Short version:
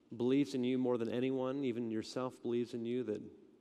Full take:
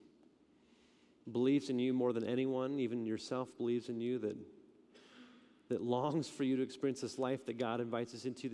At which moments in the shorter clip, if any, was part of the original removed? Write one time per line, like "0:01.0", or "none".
none